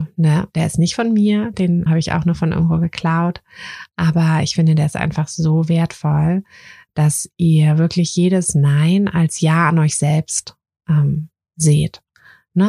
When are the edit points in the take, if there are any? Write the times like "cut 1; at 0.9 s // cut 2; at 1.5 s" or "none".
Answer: cut 1; at 1.9 s